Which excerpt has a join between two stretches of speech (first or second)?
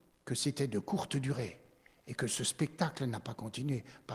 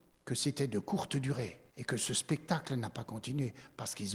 second